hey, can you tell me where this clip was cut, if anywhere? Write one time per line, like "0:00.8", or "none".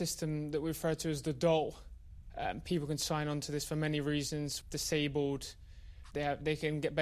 0:04.6
0:06.1